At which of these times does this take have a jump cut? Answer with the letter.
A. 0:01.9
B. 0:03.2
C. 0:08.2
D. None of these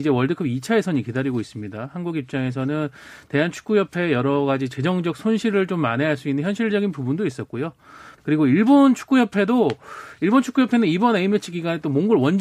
C